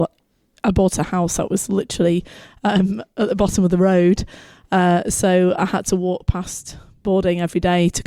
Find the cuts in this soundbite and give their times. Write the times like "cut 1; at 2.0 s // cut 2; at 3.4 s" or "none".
none